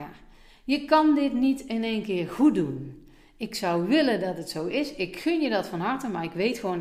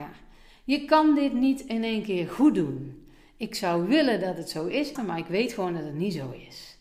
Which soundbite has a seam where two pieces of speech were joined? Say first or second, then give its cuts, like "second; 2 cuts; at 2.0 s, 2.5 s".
second; 1 cut; at 5.0 s